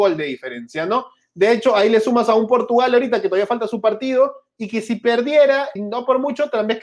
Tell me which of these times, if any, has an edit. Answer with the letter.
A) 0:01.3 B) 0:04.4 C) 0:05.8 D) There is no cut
C